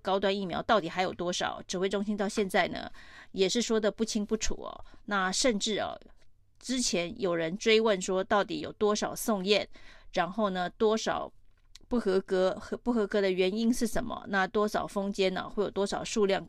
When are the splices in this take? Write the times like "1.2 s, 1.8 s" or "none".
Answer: none